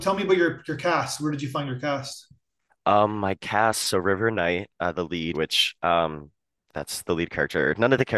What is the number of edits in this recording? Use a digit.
2